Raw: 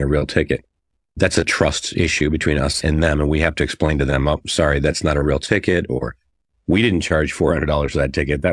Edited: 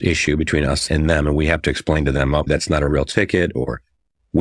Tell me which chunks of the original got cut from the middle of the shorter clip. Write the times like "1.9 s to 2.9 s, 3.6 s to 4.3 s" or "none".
4.4 s to 4.8 s